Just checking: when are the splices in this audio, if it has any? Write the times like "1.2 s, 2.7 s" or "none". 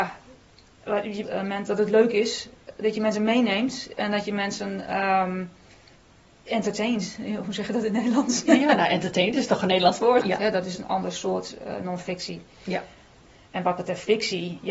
1.2 s, 10.2 s